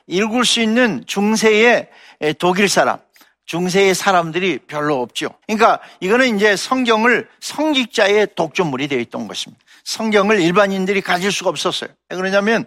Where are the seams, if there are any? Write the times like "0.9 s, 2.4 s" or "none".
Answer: 5.4 s